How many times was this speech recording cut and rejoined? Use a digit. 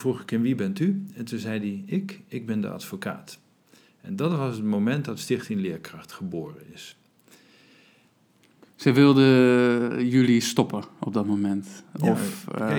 0